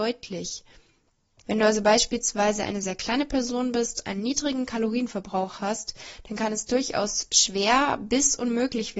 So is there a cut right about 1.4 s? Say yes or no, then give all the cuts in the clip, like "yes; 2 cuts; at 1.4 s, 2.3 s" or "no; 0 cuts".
yes; 1 cut; at 1.4 s